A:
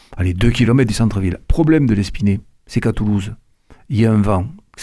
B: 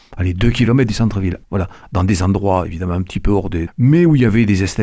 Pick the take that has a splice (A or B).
B